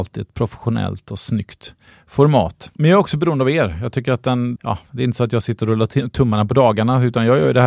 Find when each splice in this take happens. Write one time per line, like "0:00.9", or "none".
0:04.6